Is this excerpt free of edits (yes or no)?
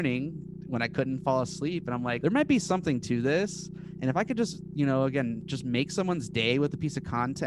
no